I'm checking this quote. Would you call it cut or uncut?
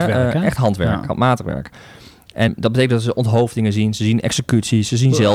cut